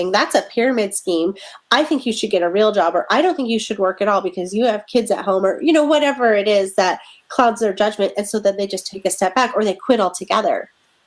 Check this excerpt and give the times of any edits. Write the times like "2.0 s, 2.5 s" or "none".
none